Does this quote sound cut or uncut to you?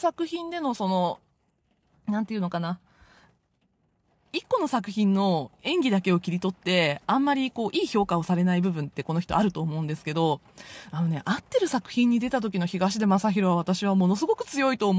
uncut